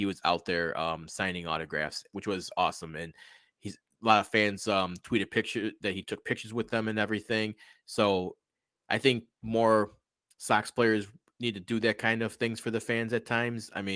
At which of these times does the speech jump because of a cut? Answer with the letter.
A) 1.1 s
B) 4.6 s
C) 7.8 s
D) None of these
D